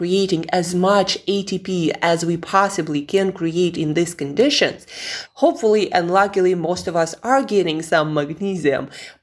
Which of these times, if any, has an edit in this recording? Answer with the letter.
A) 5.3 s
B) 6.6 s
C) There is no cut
A